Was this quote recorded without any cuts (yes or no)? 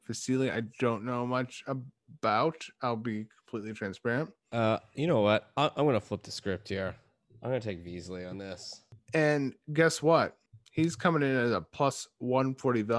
no